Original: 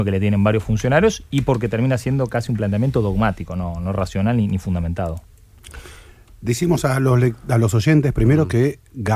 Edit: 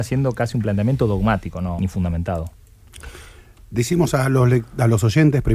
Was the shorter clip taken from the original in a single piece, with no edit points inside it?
no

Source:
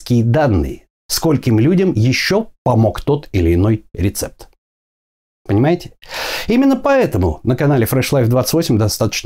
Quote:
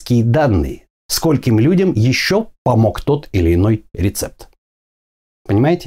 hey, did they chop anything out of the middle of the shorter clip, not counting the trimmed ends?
no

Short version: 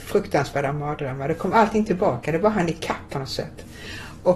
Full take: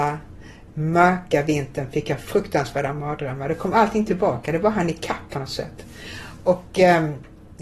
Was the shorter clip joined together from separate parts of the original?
no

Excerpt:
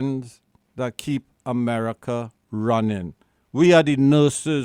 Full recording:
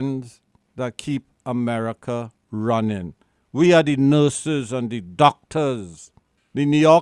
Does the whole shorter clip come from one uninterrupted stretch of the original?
yes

